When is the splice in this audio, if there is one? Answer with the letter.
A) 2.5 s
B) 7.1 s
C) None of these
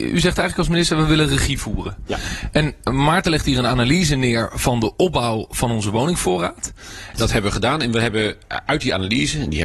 B